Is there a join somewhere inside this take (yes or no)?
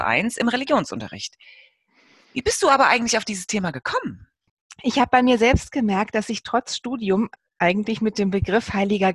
no